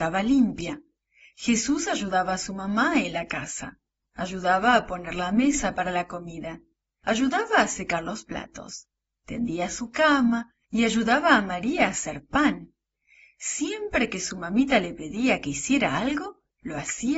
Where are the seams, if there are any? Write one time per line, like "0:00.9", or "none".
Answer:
none